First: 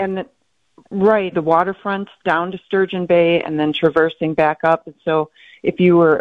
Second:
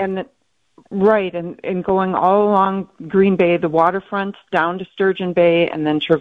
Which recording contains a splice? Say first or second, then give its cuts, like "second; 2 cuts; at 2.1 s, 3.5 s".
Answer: first; 1 cut; at 1.3 s